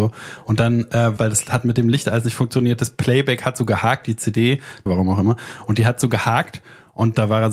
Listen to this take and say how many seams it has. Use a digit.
2